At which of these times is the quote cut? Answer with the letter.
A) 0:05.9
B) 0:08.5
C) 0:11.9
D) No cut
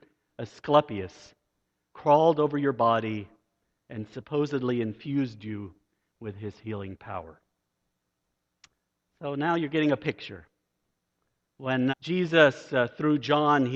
C